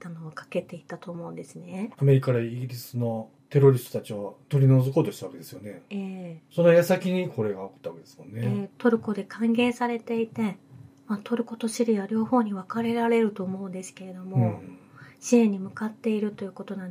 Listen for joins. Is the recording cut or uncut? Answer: cut